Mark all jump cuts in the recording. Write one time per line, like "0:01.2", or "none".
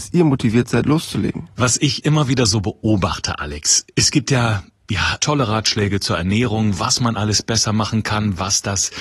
0:03.9
0:05.2